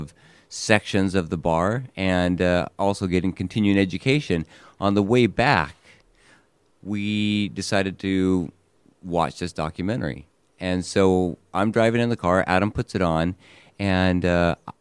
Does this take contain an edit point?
no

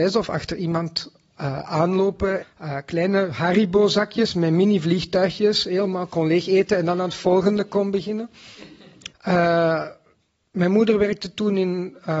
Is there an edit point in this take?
yes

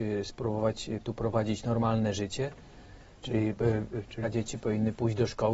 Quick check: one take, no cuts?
no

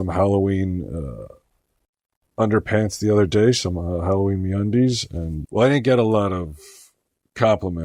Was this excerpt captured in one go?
no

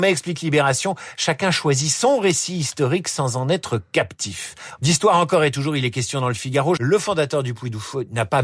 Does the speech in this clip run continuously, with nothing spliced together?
no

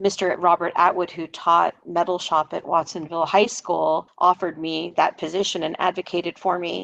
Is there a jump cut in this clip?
no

